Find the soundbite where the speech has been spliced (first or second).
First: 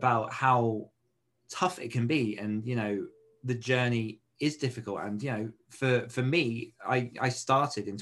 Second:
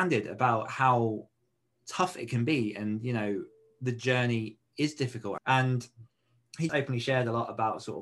second